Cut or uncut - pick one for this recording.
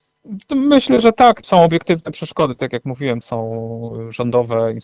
cut